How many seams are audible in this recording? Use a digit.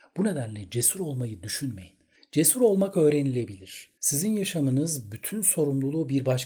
2